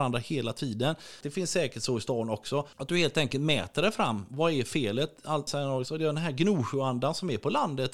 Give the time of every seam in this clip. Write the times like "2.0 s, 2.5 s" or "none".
1.2 s, 2.7 s, 5.5 s